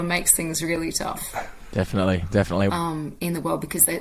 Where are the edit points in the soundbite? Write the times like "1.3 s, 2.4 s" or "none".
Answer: 2.7 s